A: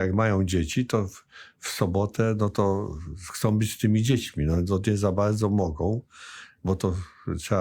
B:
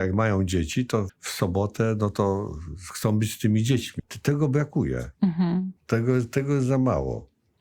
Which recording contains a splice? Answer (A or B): B